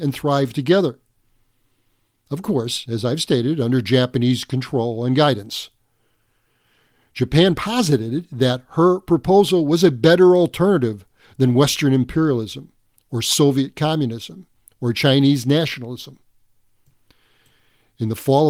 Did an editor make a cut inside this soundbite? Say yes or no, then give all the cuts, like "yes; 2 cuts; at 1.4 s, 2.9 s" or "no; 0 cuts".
no; 0 cuts